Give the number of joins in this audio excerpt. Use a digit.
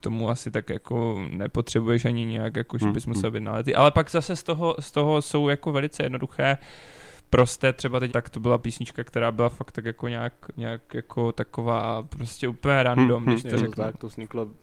1